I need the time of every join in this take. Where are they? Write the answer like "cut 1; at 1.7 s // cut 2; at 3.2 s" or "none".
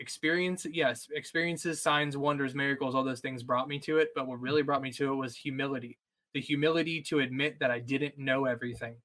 none